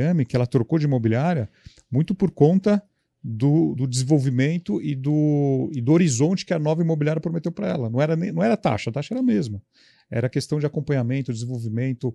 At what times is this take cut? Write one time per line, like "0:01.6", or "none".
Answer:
0:03.7